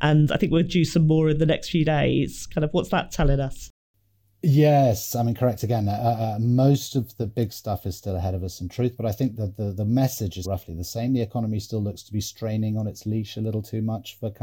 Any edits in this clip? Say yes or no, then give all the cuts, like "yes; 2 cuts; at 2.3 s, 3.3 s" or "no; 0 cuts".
yes; 1 cut; at 10.4 s